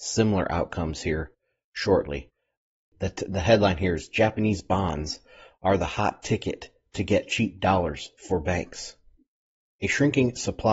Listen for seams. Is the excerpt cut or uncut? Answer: uncut